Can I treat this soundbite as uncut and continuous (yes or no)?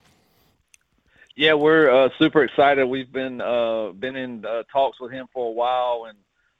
yes